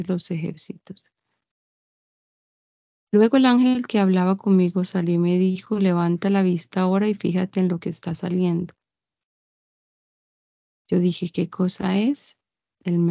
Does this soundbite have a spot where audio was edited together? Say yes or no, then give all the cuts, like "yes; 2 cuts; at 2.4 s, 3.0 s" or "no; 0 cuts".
no; 0 cuts